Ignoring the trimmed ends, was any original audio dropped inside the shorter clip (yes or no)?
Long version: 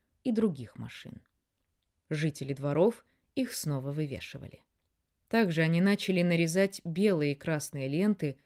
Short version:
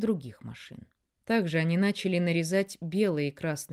yes